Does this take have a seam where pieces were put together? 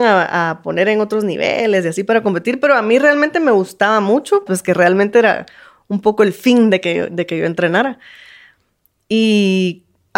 yes; 1 cut; at 4.5 s

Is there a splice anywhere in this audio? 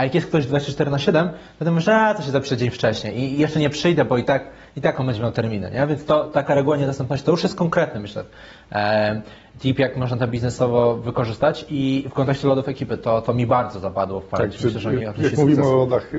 no; 0 cuts

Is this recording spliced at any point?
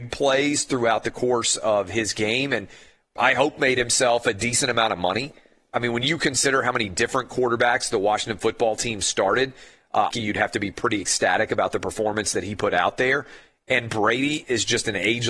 yes; 1 cut; at 10.1 s

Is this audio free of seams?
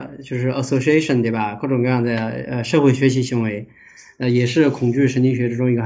yes; 0 cuts

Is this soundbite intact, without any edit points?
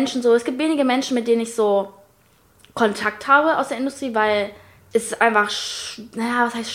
yes; 0 cuts

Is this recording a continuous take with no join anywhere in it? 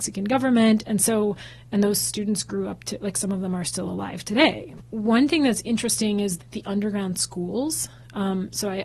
no; 2 cuts; at 4.8 s, 6.4 s

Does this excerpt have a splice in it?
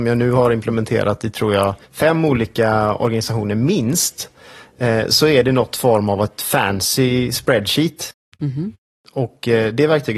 yes; 1 cut; at 1.8 s

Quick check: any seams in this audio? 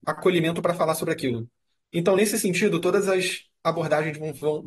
no; 0 cuts

